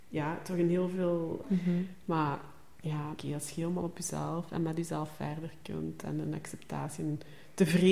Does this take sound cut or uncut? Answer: cut